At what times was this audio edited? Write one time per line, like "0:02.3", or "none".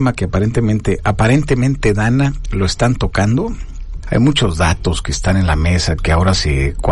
0:04.0
0:06.0